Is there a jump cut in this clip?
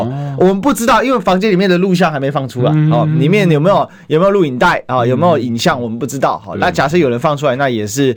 no; 0 cuts

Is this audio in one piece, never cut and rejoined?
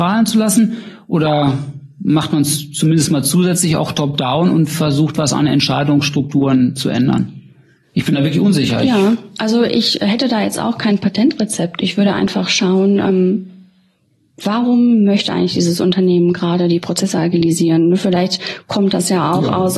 yes; 0 cuts

